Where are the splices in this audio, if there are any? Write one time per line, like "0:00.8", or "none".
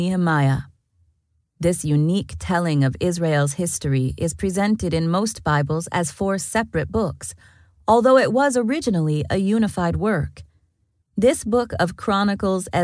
0:11.0